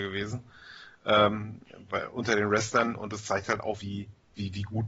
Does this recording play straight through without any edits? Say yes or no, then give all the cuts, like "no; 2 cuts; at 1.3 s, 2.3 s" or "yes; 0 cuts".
no; 2 cuts; at 1.9 s, 3.8 s